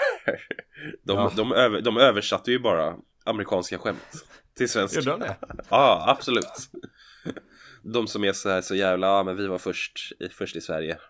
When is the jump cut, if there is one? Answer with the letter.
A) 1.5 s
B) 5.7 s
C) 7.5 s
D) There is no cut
B